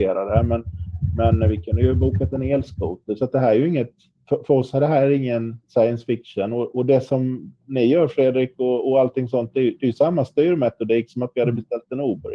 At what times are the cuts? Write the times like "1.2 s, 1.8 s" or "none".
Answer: none